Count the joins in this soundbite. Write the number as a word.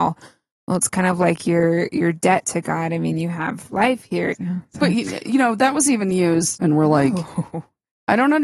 two